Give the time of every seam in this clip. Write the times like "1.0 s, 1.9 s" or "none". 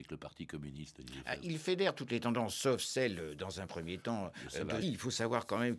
4.8 s